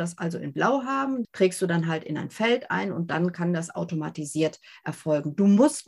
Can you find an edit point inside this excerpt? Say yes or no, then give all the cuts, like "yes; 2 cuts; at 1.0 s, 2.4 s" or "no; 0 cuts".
yes; 1 cut; at 1.2 s